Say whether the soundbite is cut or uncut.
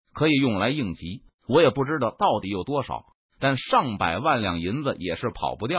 cut